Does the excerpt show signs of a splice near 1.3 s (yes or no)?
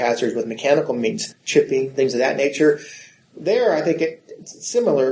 yes